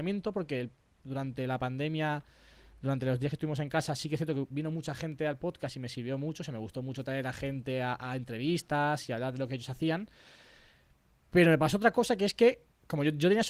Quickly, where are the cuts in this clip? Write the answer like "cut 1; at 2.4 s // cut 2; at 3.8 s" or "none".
none